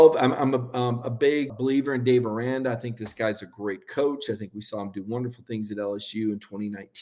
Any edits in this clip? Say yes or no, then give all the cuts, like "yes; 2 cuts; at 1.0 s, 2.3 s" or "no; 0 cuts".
yes; 1 cut; at 1.5 s